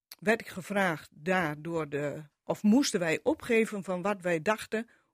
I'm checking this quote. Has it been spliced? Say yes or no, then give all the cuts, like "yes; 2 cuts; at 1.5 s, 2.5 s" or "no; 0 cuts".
no; 0 cuts